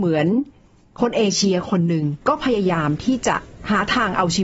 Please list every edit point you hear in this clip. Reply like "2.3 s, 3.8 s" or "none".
2.2 s